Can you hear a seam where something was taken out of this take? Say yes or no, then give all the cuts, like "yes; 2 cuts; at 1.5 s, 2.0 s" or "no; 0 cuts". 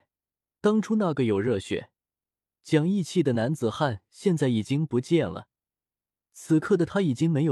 no; 0 cuts